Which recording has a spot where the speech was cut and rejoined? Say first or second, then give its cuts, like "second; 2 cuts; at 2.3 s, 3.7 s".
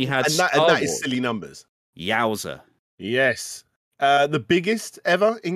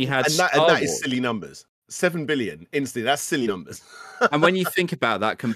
first; 1 cut; at 1.8 s